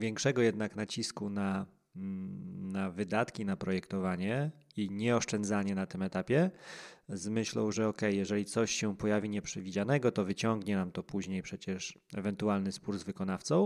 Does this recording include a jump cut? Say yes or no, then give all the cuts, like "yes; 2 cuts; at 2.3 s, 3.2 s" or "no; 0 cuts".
no; 0 cuts